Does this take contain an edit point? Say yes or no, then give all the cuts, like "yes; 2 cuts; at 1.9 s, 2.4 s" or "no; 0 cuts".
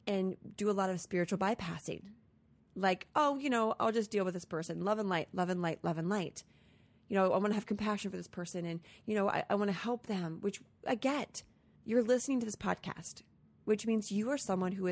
yes; 1 cut; at 11.8 s